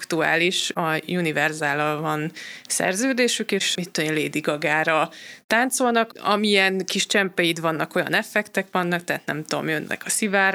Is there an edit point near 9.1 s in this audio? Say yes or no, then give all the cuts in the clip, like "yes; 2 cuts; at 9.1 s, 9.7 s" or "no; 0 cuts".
no; 1 cut; at 3.7 s